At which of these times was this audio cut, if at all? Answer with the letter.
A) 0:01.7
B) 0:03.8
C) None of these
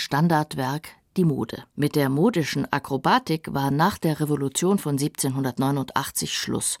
A